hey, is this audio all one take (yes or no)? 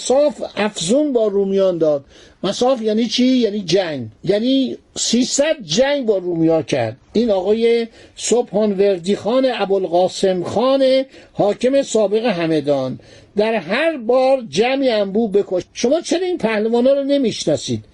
no